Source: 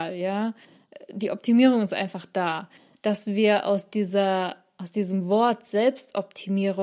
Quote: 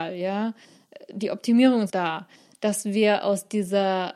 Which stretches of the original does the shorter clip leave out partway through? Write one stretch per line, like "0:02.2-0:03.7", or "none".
0:01.9-0:02.3